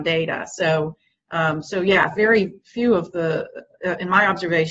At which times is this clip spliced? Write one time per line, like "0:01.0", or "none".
none